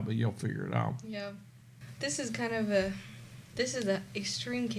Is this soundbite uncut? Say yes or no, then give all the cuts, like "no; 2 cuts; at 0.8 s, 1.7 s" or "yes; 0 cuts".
yes; 0 cuts